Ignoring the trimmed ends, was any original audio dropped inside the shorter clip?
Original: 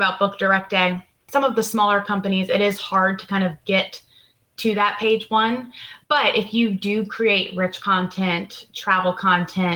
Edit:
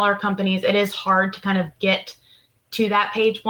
no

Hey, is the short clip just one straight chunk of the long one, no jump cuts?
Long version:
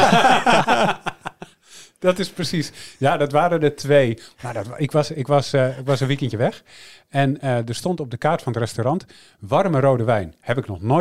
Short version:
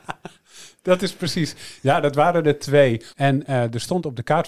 no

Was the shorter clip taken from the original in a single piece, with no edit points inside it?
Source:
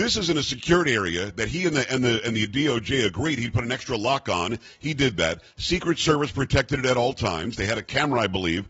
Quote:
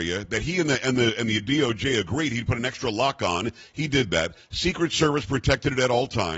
yes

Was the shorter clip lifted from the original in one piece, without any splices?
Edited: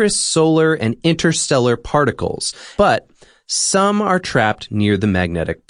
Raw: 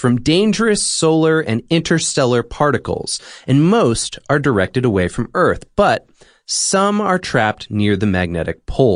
no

